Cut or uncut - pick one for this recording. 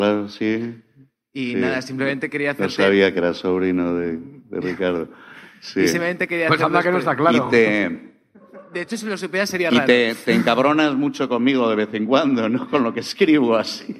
uncut